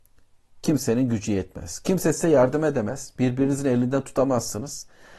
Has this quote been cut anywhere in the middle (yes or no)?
no